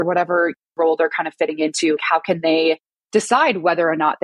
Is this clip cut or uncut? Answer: cut